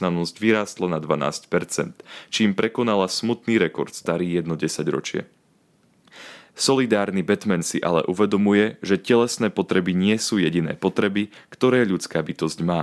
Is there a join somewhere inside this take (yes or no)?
yes